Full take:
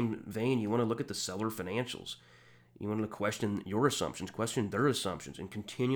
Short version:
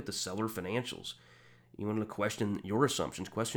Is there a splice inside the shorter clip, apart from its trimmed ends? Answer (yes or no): no